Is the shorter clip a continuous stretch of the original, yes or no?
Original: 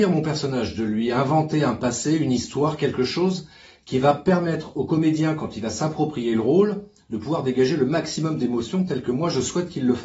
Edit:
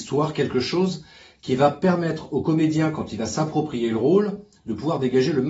yes